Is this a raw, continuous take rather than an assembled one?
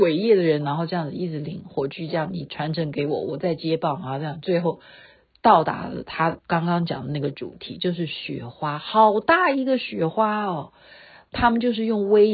yes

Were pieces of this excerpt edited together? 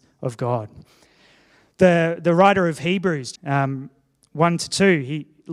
yes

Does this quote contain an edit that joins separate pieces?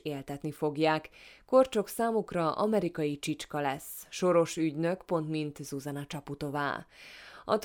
no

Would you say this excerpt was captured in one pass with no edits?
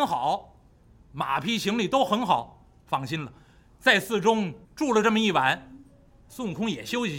no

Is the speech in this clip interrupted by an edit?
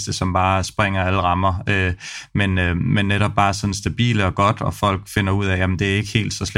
no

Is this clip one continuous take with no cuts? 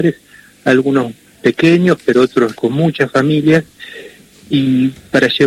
no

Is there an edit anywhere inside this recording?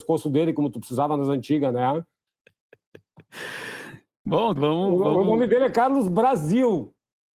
yes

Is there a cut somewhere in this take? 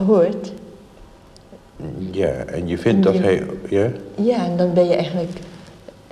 no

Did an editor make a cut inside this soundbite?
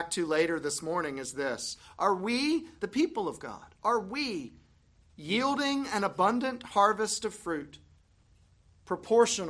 yes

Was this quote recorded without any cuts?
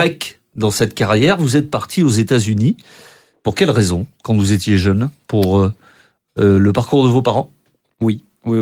yes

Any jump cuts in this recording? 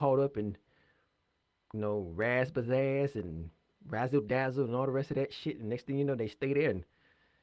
no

